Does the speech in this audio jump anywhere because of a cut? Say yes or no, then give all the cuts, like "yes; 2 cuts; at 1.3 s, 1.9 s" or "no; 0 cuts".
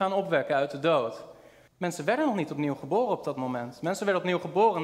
yes; 1 cut; at 1.7 s